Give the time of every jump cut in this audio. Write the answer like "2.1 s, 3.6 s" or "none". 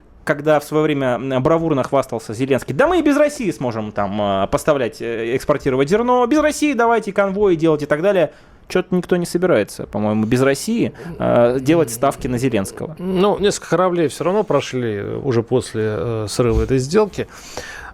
none